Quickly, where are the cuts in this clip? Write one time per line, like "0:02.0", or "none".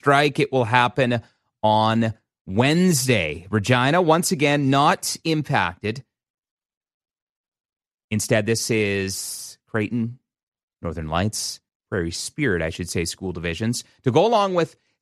0:11.7